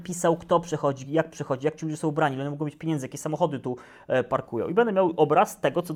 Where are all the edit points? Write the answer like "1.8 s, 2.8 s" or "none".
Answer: none